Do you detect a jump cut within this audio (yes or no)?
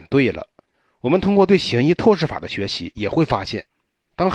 no